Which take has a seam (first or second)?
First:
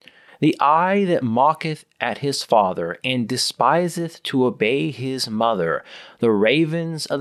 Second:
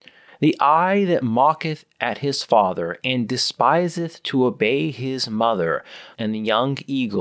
second